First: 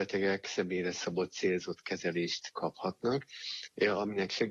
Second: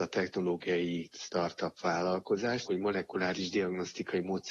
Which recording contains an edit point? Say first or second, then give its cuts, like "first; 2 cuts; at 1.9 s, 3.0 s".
second; 1 cut; at 2.7 s